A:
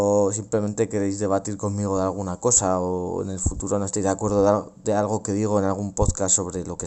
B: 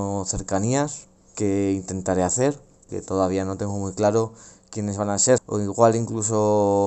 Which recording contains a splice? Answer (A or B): B